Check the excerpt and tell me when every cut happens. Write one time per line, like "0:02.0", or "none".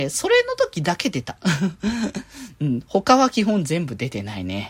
none